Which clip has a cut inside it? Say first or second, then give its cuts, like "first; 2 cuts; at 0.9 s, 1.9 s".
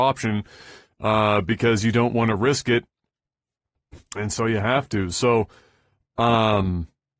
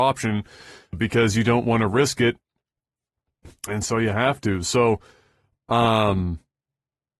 second; 1 cut; at 0.9 s